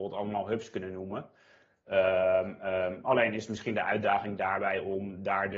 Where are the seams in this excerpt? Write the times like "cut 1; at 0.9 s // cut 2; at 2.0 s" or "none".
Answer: none

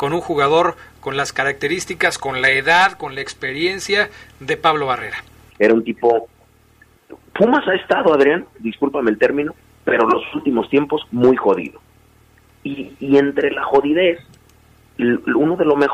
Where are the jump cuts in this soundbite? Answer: cut 1; at 5.5 s

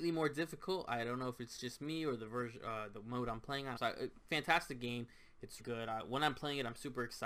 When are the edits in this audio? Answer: cut 1; at 3.8 s // cut 2; at 5.6 s

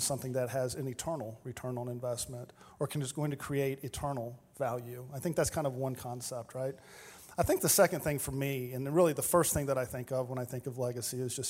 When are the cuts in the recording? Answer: none

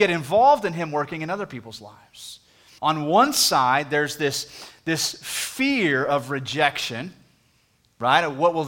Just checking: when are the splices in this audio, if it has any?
cut 1; at 2.8 s

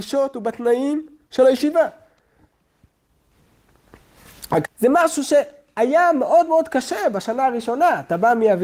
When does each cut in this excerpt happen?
cut 1; at 4.6 s

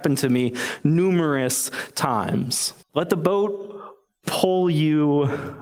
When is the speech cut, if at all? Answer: cut 1; at 2.8 s

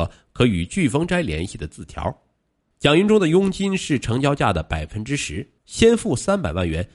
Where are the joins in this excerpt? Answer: cut 1; at 2.7 s // cut 2; at 5.6 s

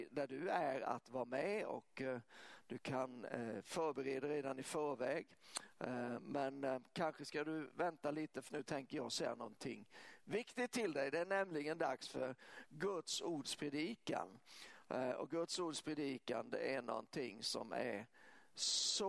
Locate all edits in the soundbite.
cut 1; at 8.5 s

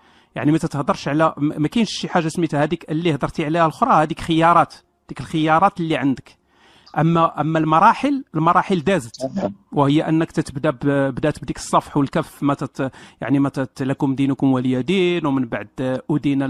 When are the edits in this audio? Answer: none

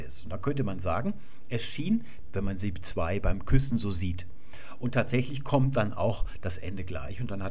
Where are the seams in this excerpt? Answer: cut 1; at 2.2 s

